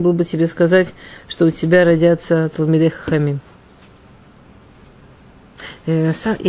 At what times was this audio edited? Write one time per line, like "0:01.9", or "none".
none